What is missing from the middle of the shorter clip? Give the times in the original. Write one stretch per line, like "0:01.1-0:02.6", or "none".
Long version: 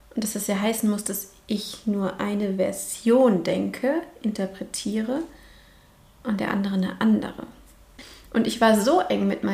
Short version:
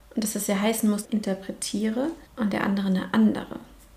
0:01.0-0:04.2
0:05.4-0:06.1